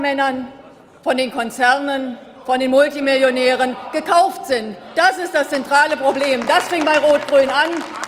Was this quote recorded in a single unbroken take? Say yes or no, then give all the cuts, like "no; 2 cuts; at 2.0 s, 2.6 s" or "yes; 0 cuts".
yes; 0 cuts